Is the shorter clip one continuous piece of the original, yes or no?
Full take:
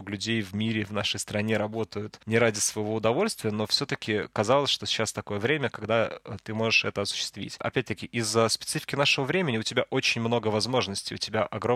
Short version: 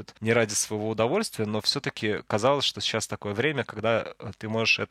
yes